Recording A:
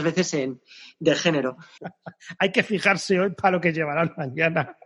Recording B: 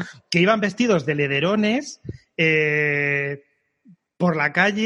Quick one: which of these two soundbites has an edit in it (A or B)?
A